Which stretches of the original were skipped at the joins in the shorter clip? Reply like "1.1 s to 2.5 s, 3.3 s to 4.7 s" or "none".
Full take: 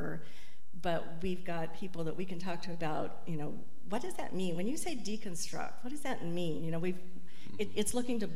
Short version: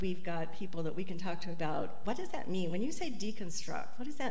3.3 s to 3.9 s